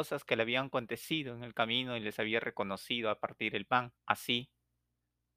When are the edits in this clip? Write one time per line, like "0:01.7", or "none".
0:04.0